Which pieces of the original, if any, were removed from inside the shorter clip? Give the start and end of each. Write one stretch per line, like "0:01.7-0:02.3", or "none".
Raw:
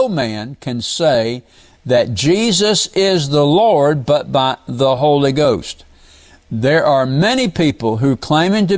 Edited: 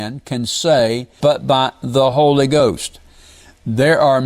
0:01.6-0:04.1